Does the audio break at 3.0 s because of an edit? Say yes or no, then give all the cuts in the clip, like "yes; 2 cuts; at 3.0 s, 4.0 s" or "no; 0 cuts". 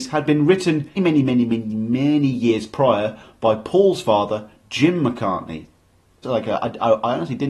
no; 2 cuts; at 1.0 s, 6.2 s